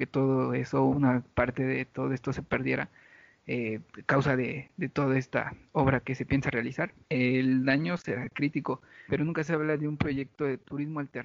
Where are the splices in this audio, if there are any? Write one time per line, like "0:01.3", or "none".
0:07.0
0:09.1